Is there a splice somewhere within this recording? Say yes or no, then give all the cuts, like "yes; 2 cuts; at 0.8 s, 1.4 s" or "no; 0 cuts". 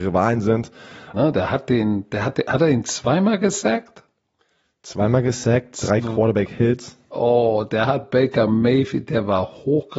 yes; 1 cut; at 1.1 s